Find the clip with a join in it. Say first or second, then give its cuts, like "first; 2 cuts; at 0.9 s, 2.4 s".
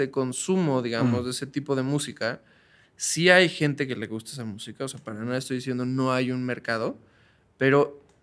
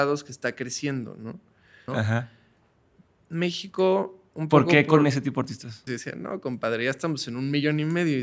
second; 2 cuts; at 1.9 s, 5.9 s